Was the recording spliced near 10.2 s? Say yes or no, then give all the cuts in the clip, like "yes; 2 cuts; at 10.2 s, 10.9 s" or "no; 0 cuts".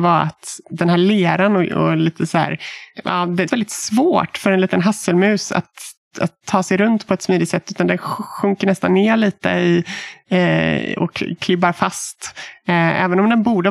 no; 1 cut; at 3.5 s